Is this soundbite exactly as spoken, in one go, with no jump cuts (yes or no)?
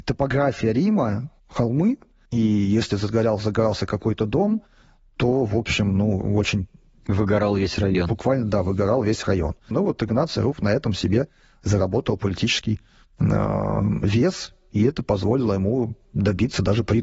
no